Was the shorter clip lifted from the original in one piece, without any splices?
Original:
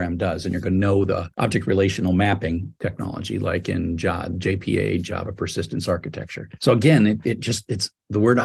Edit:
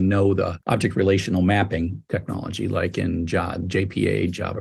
yes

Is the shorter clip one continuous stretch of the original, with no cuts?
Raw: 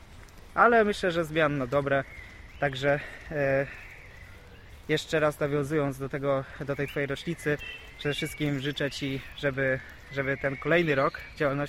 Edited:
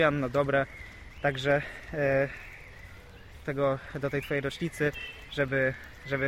no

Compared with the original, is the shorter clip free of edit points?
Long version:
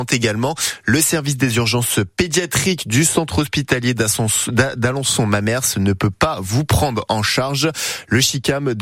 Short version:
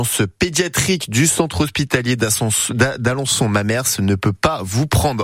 yes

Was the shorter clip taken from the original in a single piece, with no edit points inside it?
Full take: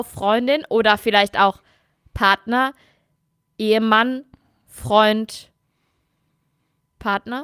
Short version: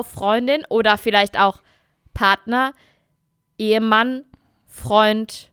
yes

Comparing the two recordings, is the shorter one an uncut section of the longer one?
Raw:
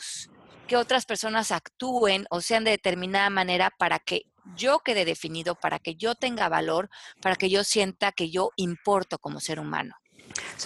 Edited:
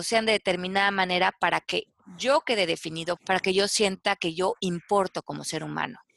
no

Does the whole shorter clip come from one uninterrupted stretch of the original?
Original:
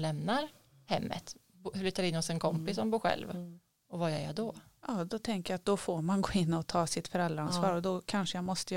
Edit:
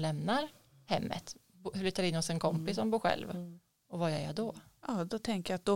yes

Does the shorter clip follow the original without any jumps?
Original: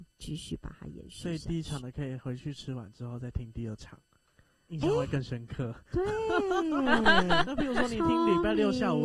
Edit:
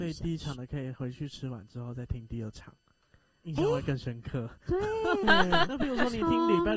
no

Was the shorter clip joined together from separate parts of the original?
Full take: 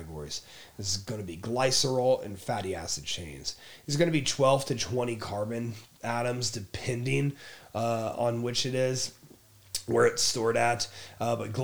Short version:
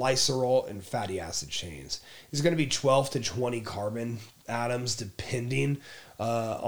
no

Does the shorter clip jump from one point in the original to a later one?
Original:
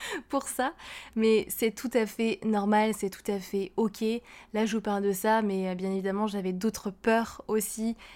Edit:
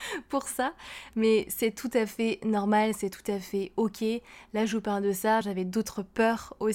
yes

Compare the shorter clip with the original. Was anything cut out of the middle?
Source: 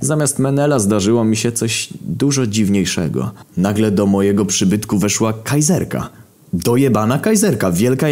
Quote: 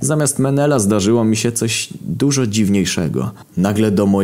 no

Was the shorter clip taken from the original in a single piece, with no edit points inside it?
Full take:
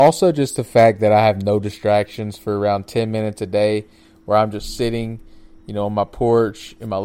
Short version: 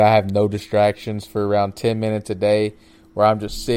yes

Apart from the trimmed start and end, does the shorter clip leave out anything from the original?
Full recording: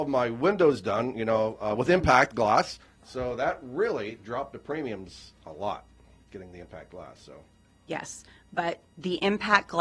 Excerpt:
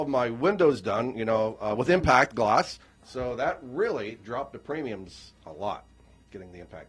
no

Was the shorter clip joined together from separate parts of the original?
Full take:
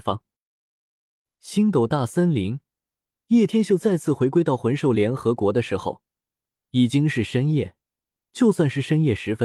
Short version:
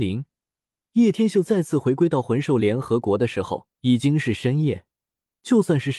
yes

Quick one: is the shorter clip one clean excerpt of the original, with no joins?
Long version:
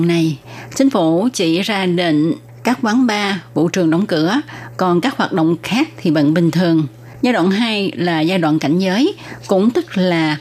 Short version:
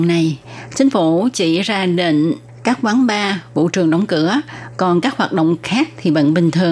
yes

